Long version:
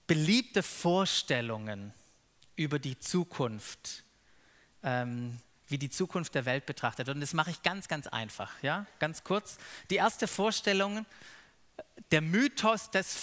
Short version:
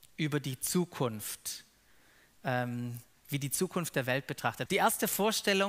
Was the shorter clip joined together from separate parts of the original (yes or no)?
yes